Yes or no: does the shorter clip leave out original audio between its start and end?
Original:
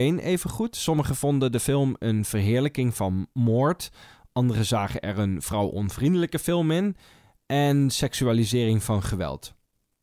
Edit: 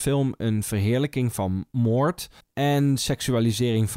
yes